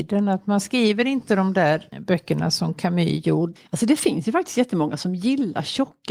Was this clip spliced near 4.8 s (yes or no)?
no